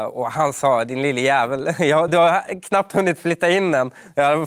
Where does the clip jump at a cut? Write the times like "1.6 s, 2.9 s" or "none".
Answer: 2.1 s